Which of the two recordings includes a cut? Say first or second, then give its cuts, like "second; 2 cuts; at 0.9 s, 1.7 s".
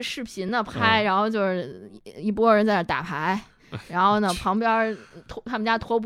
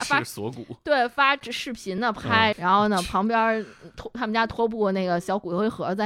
second; 1 cut; at 2.5 s